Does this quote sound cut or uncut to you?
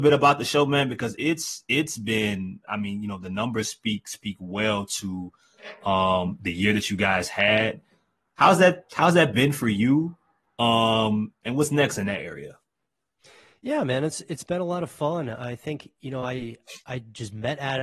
uncut